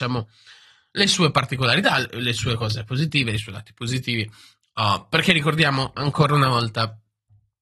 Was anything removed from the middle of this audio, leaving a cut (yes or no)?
no